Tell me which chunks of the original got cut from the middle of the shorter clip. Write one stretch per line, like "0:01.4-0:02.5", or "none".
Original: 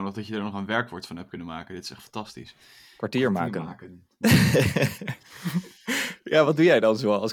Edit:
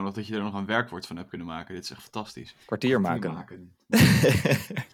0:02.6-0:02.9